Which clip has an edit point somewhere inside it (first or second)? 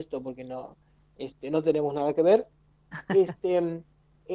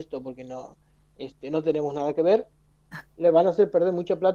second